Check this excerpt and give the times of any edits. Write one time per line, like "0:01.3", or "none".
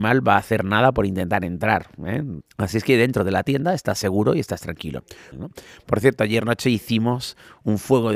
0:02.4
0:05.3